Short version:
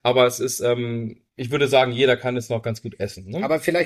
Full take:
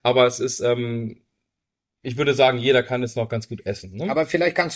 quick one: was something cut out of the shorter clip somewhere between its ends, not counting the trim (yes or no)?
yes